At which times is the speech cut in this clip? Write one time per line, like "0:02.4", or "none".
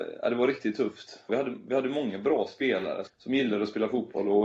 0:01.3
0:03.1